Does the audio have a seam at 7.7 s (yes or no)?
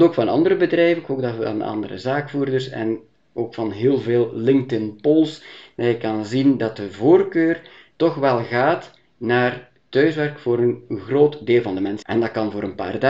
no